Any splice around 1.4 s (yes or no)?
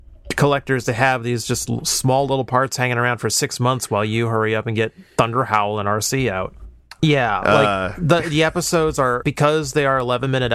no